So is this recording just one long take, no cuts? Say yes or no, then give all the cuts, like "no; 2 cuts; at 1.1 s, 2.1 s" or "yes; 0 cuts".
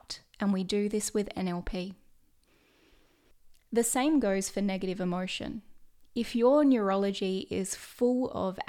yes; 0 cuts